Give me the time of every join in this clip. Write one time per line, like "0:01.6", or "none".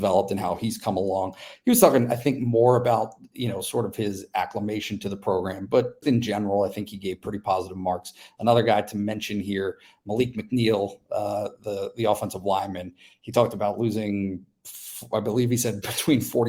0:06.0